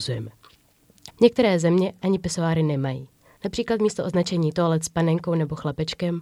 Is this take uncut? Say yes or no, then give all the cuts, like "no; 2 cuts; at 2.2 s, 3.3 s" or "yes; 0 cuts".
no; 2 cuts; at 1.1 s, 3.4 s